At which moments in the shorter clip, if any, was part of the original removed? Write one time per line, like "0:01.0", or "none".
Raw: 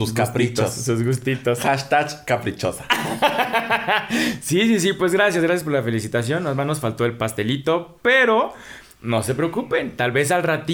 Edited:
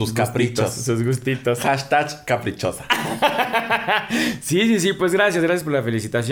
none